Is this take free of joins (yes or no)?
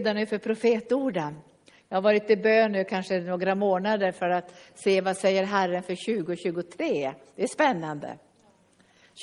yes